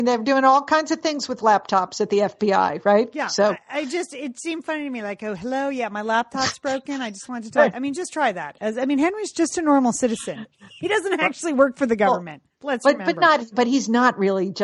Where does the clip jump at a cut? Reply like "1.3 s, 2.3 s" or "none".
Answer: 7.7 s